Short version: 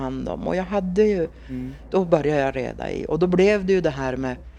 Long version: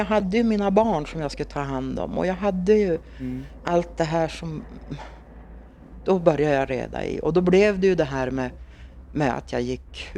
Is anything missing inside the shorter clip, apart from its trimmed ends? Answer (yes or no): yes